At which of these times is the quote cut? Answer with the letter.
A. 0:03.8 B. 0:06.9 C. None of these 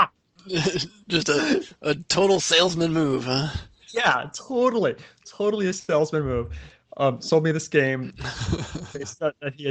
C